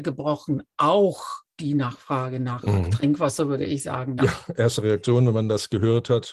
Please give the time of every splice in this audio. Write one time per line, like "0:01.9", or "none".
0:04.2